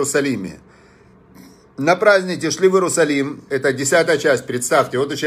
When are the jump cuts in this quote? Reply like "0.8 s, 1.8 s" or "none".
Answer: 3.5 s